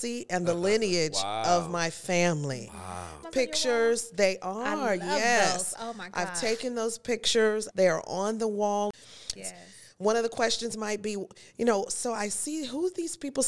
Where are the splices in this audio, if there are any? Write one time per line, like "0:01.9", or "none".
0:03.2
0:07.7
0:09.4